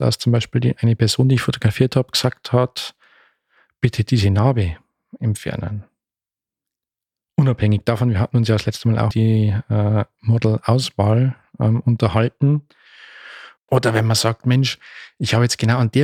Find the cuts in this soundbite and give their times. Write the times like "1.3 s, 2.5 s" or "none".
9.1 s, 13.6 s